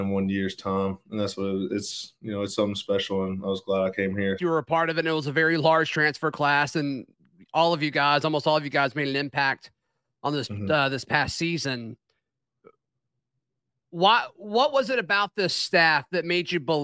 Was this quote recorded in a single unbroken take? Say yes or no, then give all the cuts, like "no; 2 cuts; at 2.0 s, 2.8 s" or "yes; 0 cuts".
no; 1 cut; at 4.4 s